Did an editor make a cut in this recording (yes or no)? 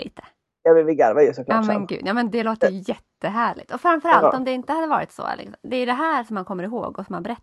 no